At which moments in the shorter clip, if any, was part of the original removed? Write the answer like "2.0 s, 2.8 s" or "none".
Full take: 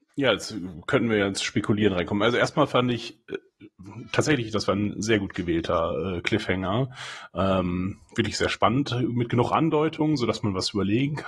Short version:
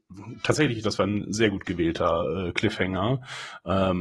none